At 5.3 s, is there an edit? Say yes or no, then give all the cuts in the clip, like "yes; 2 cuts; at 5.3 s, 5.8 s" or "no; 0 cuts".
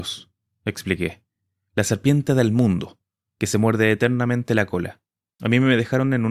yes; 1 cut; at 5.3 s